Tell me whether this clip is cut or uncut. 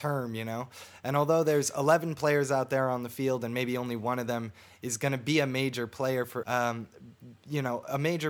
cut